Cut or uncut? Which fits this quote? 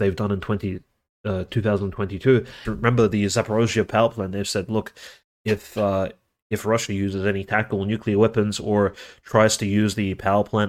cut